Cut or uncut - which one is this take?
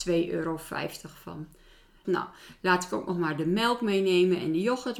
cut